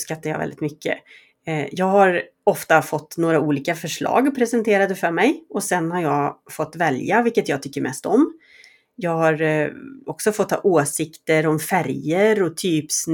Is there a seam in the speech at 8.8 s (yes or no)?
no